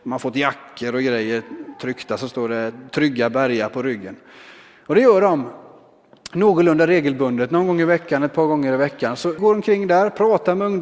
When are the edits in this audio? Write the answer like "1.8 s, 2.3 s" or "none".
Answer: 9.4 s